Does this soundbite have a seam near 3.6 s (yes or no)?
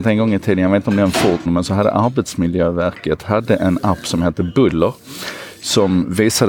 no